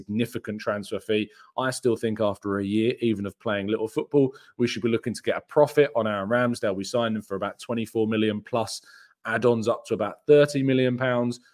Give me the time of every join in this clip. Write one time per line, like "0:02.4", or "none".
none